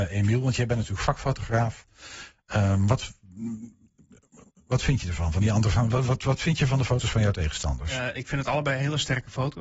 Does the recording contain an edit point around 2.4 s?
no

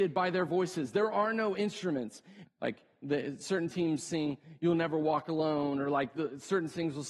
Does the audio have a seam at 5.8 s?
no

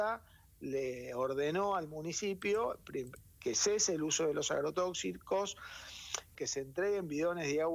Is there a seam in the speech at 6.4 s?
yes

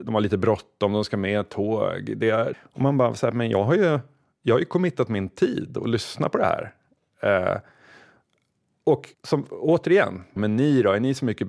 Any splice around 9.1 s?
yes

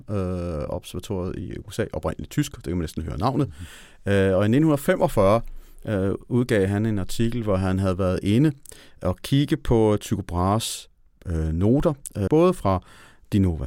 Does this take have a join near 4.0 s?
no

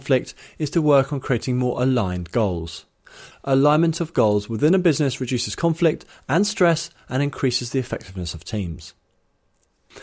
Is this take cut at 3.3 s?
yes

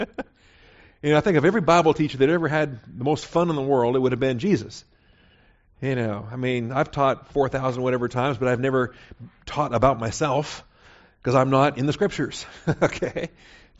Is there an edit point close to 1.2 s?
no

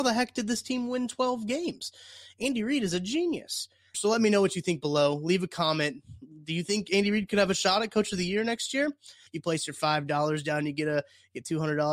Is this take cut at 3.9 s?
yes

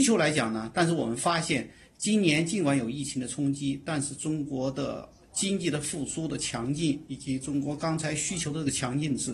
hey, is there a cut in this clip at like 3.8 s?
no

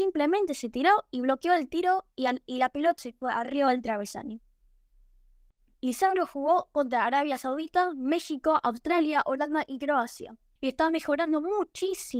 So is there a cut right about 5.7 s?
yes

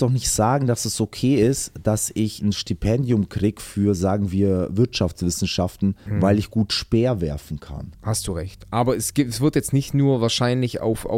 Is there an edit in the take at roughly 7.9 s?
yes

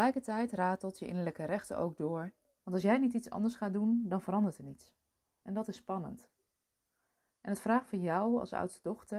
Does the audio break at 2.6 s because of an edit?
yes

